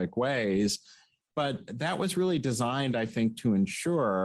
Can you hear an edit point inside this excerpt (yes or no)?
no